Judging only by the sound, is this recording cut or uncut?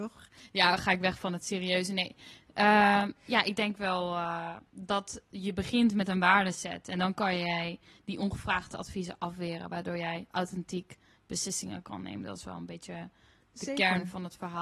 cut